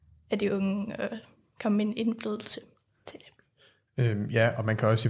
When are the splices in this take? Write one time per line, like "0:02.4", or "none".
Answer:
none